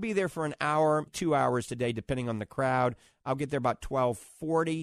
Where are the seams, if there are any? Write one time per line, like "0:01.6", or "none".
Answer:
0:01.1